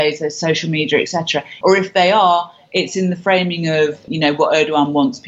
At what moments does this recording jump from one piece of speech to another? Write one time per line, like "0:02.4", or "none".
0:01.6
0:04.1